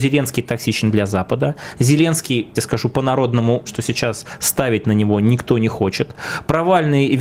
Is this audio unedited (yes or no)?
no